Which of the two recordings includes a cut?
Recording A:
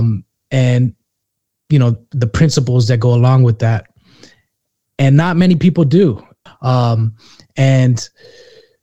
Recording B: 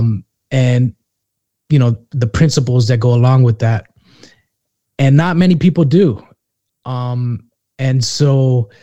A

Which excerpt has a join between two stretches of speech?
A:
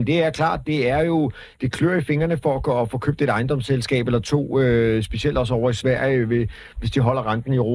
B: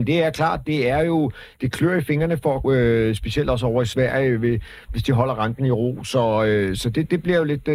B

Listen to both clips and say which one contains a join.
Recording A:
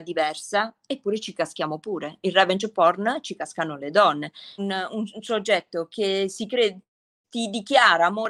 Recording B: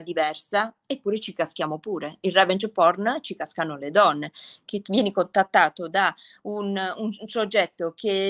A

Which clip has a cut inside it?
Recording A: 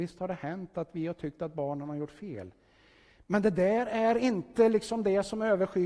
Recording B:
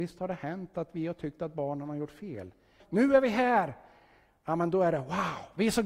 B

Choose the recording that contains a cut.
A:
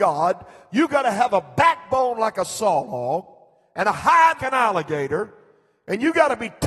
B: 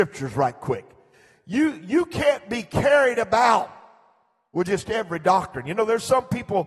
A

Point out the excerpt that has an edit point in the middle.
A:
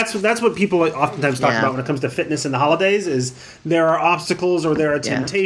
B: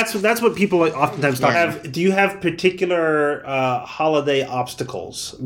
B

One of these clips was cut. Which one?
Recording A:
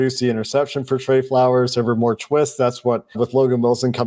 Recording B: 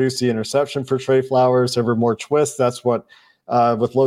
A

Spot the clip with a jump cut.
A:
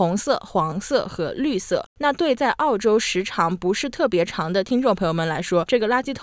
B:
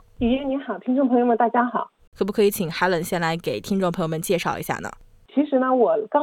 B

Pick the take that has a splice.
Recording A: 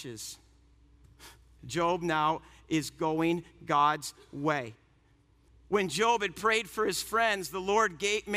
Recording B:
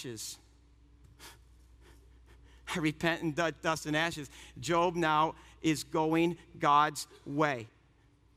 A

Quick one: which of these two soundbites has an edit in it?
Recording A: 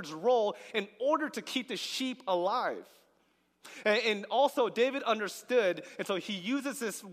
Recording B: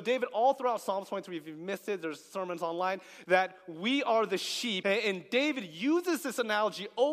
B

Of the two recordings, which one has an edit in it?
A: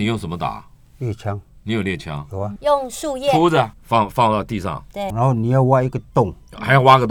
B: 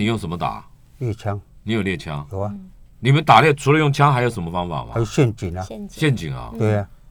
A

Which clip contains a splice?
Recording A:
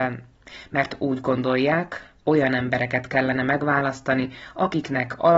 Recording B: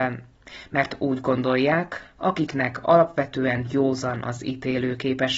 B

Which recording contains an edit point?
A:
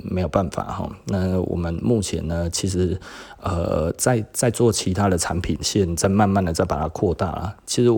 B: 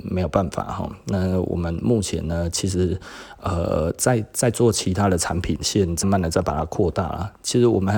B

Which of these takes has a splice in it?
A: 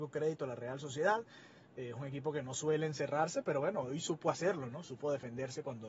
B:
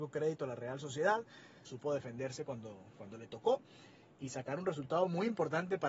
B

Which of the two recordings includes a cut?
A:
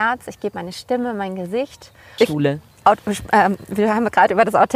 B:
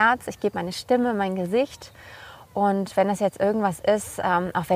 A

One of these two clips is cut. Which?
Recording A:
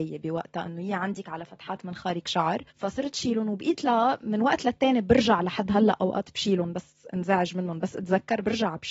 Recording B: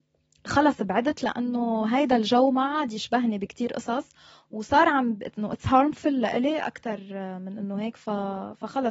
A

